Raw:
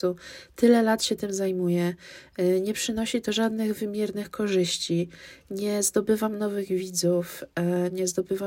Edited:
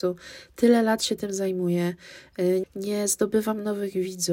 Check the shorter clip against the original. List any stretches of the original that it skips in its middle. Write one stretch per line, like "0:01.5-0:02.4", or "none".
0:02.6-0:05.4